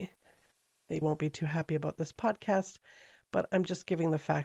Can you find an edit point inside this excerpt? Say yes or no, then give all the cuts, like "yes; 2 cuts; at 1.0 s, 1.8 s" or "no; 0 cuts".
yes; 1 cut; at 1.0 s